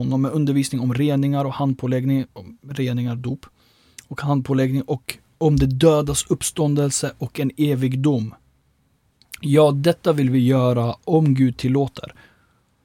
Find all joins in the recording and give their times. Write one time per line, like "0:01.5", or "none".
none

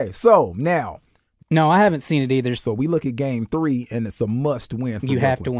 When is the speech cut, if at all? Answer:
0:01.4
0:02.6

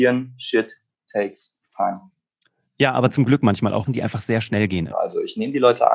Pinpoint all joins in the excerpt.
0:03.9
0:04.9

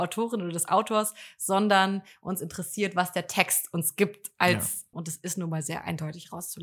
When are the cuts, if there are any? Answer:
0:04.9

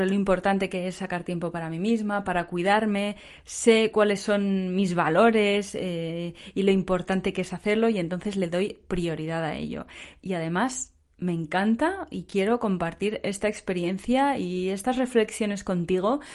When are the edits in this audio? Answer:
none

